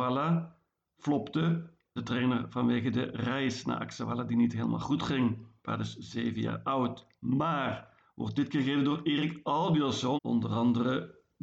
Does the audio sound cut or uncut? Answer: cut